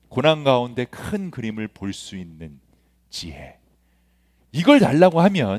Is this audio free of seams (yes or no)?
yes